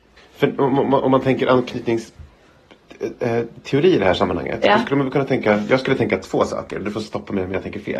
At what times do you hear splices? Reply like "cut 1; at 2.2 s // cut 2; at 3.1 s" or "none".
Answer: none